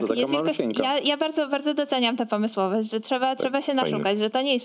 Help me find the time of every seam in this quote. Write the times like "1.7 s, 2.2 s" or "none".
none